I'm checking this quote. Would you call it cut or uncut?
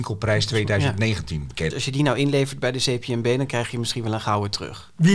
cut